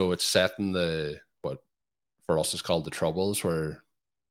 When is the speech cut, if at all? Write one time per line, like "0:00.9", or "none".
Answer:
none